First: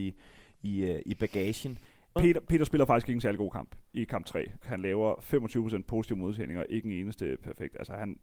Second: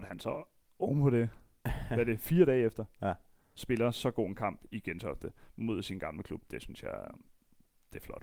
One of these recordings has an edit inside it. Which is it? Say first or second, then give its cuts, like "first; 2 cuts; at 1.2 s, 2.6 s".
first; 2 cuts; at 2.2 s, 4.6 s